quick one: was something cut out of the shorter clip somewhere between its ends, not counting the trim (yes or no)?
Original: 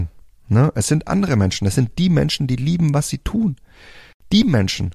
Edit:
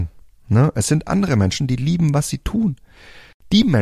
yes